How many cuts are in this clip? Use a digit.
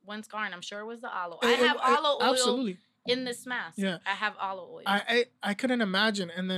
0